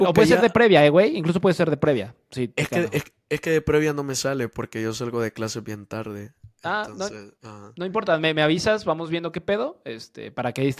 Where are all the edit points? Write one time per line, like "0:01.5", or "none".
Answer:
none